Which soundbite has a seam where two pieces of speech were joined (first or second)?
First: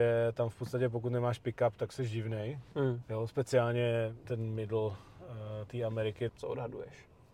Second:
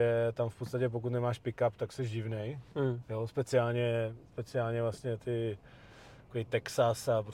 first